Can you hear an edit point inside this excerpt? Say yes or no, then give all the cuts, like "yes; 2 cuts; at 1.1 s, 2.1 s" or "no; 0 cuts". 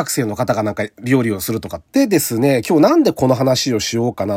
yes; 1 cut; at 1.9 s